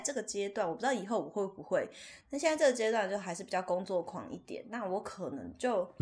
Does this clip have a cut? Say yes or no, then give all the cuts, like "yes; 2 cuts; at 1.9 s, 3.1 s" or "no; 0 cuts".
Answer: no; 0 cuts